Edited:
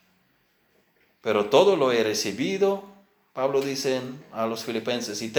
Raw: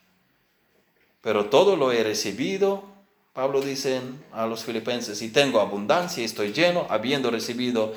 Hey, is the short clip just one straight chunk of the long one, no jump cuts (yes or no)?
yes